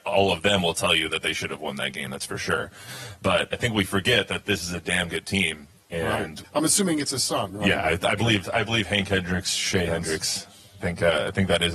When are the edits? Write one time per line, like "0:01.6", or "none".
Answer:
0:03.5
0:06.4

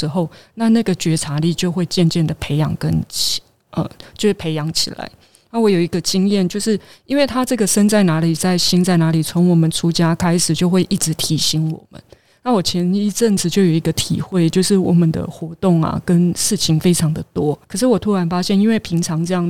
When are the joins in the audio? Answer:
0:17.6

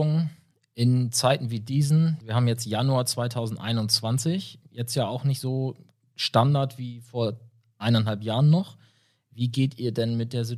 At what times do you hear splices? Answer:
0:02.2

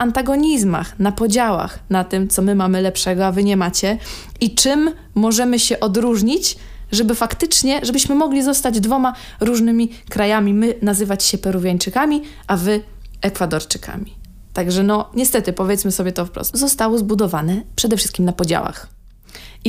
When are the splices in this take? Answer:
0:16.5

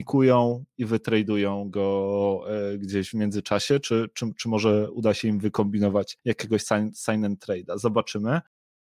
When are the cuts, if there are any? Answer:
none

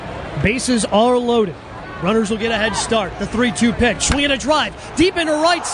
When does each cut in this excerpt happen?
none

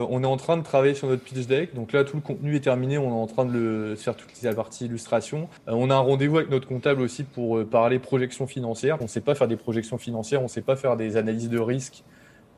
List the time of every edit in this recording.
0:05.6
0:09.0

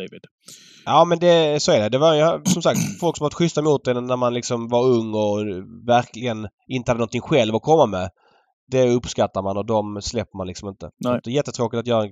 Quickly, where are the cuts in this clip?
none

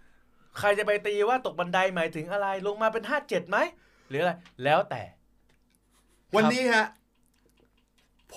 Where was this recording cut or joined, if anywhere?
none

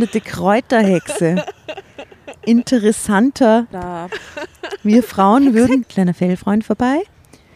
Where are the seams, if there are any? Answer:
0:03.7
0:05.8

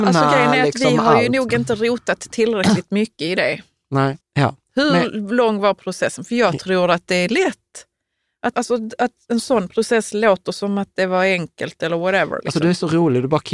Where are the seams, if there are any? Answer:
0:04.2
0:08.5

